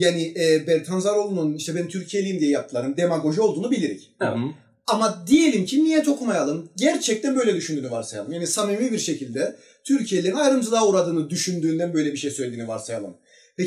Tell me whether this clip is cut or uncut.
uncut